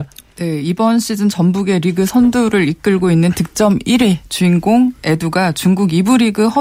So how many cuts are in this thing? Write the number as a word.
zero